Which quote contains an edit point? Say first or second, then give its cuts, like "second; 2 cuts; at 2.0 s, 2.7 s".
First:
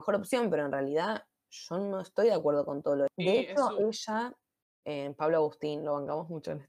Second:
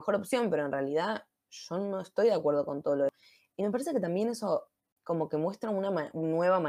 first; 2 cuts; at 3.1 s, 4.8 s